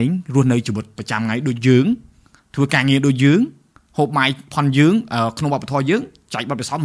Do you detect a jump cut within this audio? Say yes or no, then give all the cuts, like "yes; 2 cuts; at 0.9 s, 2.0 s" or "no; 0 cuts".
no; 0 cuts